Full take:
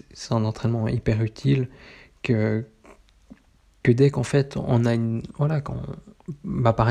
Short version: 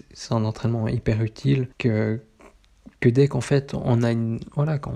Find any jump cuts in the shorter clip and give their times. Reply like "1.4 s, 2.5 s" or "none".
1.7 s, 3.0 s